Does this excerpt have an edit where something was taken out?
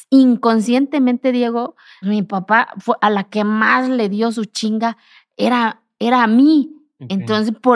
yes; 1 cut; at 2.0 s

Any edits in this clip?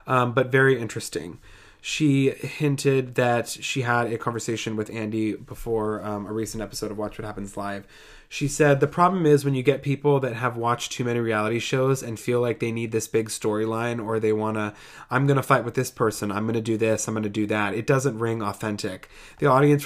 no; 0 cuts

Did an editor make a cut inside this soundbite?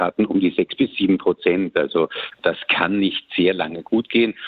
no; 0 cuts

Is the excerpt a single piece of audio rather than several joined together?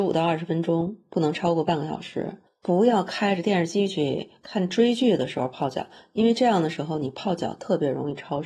yes; 0 cuts

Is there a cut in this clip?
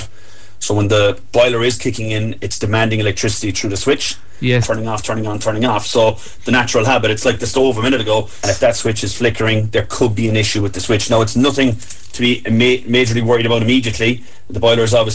yes; 2 cuts; at 4.6 s, 8.4 s

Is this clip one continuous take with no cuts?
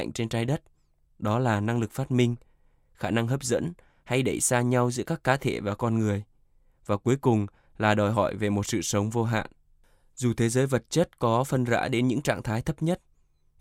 yes; 0 cuts

